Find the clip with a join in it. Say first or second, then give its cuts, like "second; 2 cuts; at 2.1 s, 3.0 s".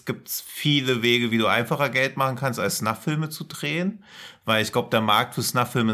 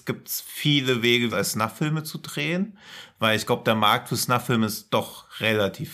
second; 1 cut; at 1.3 s